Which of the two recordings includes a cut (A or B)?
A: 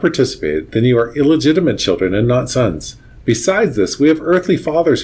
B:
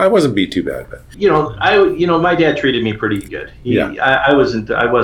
B